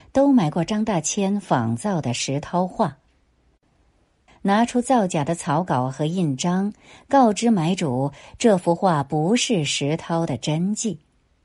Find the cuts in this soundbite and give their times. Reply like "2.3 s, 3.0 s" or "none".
4.3 s

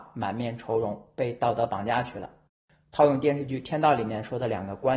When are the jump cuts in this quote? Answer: none

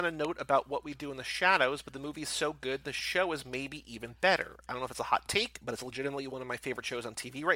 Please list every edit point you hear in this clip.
none

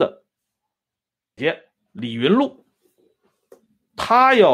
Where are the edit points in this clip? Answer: 1.4 s

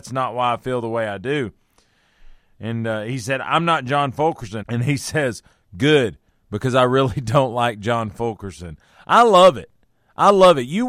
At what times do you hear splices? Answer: 4.6 s

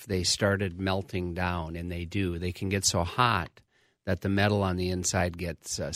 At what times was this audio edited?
none

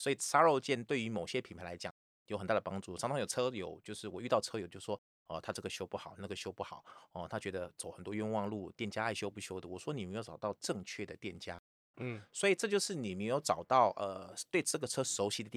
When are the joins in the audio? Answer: 11.9 s

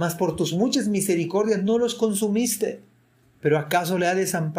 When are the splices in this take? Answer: 3.2 s

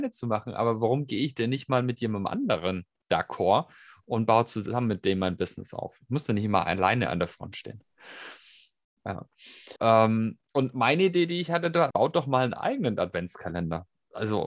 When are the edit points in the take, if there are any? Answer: 9.8 s, 11.9 s

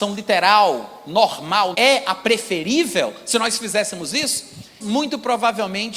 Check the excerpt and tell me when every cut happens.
1.7 s, 4.8 s

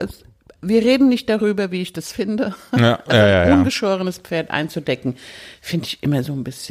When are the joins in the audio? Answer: none

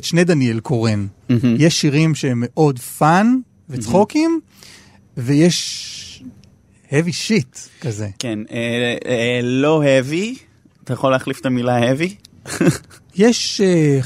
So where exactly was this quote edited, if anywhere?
none

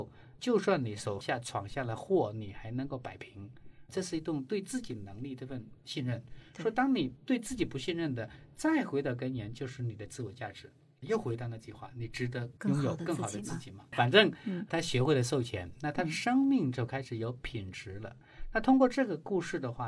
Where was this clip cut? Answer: 13.9 s

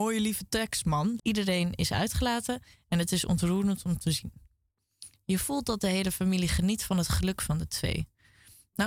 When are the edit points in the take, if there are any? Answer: 1.2 s

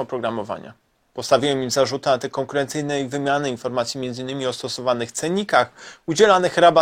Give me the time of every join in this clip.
none

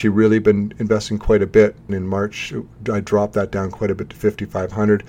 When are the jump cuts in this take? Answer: 1.9 s

